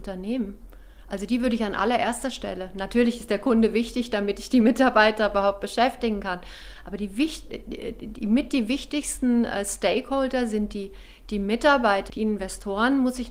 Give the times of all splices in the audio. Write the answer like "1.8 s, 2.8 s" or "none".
12.1 s